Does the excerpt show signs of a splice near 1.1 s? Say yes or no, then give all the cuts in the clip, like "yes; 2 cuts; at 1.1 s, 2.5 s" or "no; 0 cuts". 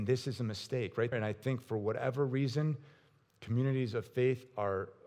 yes; 1 cut; at 1.1 s